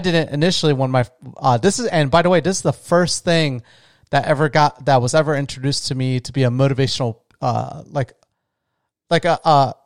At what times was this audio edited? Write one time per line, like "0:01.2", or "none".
none